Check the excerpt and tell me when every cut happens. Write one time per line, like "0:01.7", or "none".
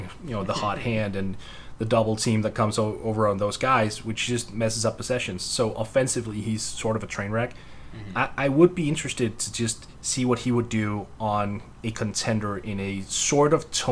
none